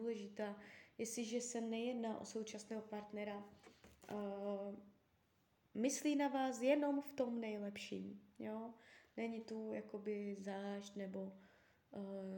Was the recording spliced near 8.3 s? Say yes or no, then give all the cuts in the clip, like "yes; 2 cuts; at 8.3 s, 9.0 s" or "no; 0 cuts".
no; 0 cuts